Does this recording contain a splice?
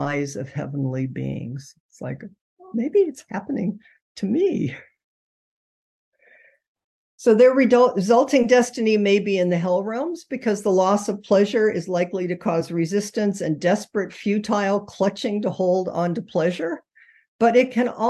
yes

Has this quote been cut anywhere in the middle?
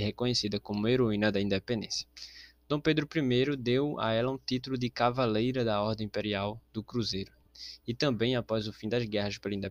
no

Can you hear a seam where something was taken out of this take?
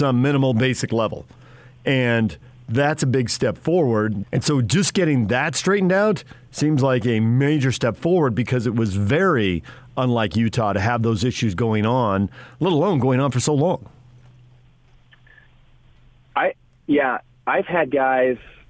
yes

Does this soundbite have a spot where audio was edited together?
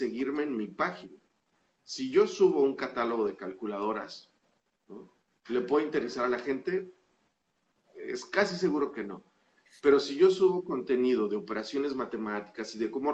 no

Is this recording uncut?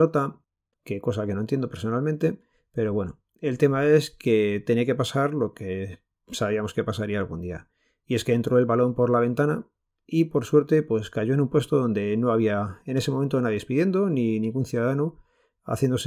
yes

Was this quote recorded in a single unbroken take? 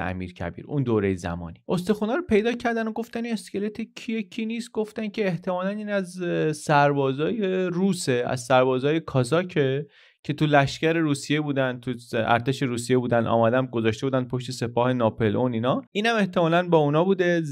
no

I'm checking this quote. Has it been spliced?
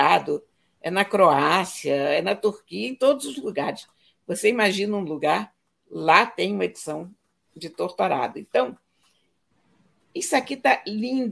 no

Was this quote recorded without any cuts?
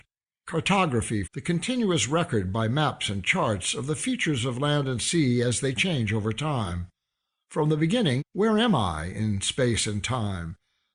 no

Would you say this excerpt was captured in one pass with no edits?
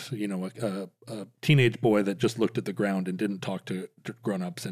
yes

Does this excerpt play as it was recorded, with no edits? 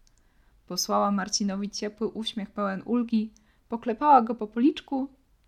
yes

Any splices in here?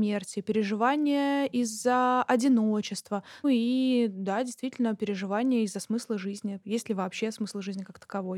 yes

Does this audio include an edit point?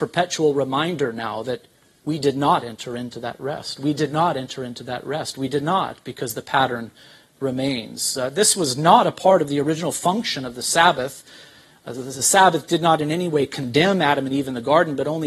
no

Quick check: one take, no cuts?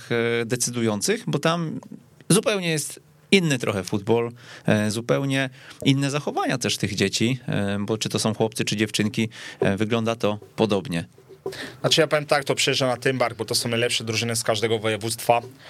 no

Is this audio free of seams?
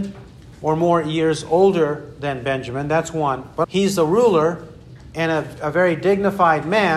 no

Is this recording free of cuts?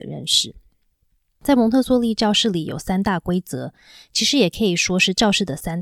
yes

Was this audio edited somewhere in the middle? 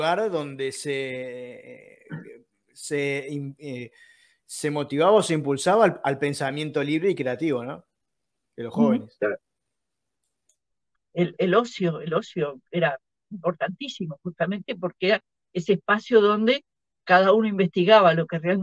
no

